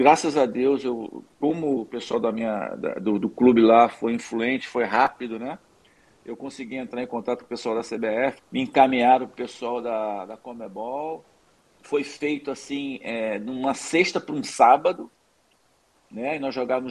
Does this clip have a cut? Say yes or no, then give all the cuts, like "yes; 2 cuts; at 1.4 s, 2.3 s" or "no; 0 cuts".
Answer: yes; 1 cut; at 8.4 s